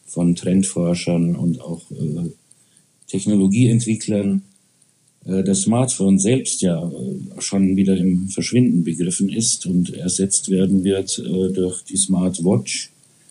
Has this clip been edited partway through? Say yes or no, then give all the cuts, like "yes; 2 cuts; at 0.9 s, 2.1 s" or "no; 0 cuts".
no; 0 cuts